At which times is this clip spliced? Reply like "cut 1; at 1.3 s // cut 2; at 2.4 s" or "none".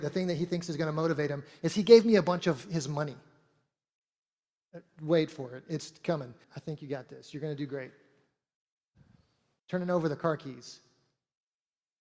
cut 1; at 6.4 s // cut 2; at 9.6 s